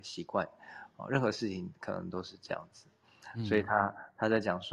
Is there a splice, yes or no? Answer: no